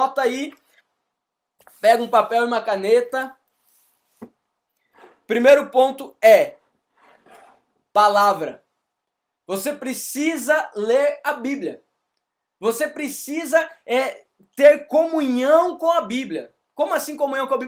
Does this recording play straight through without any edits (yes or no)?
yes